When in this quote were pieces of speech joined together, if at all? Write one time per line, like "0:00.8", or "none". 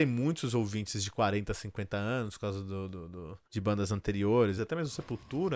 0:03.4
0:04.6